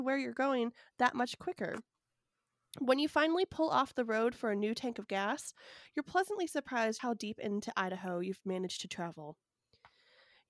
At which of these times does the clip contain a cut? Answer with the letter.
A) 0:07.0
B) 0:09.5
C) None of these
A